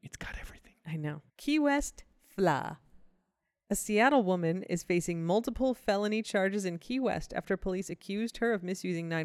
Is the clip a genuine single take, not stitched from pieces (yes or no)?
no